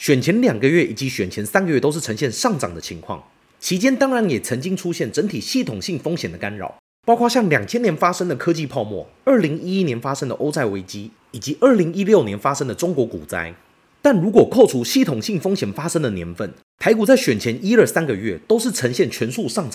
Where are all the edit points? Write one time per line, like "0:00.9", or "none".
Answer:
none